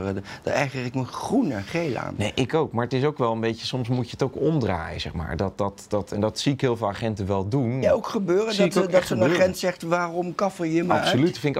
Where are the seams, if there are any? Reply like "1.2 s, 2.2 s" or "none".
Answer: 7.8 s